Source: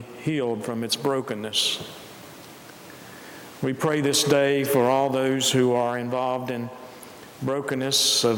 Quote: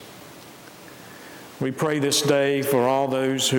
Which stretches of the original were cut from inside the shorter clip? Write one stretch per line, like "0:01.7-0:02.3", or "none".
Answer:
none